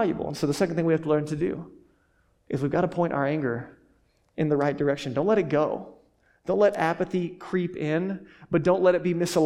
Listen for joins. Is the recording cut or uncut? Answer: uncut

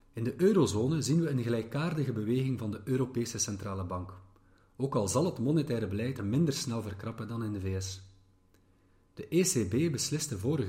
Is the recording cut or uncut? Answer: cut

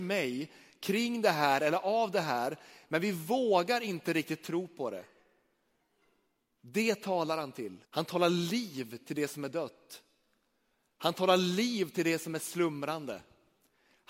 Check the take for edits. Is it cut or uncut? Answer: cut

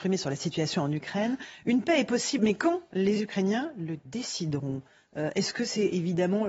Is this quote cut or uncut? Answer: cut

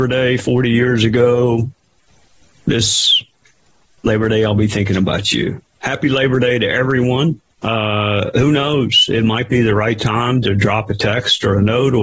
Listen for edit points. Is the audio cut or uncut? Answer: uncut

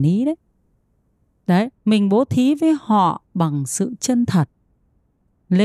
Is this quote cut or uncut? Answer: cut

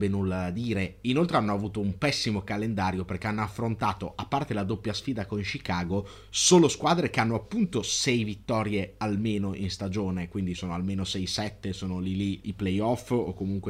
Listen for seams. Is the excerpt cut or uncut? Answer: cut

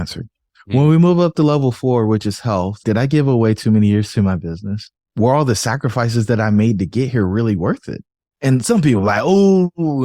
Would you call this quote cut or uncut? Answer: cut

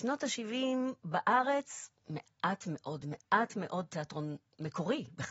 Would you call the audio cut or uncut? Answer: uncut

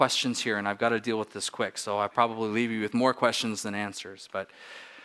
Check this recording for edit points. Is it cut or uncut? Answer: uncut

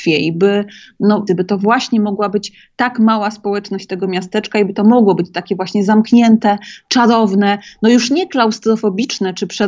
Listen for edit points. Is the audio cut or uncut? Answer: cut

